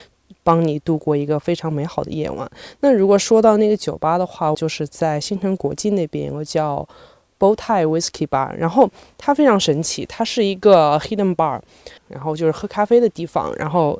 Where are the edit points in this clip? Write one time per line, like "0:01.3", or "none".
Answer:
0:04.5
0:12.0